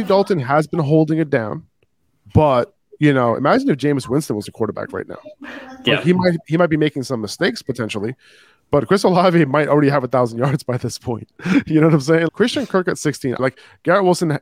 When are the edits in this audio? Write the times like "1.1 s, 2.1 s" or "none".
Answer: 12.3 s, 13.4 s